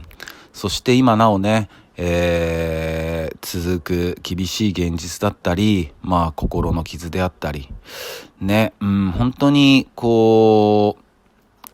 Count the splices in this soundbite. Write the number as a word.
zero